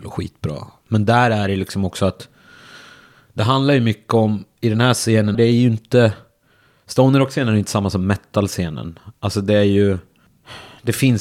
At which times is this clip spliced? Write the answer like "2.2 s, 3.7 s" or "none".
5.3 s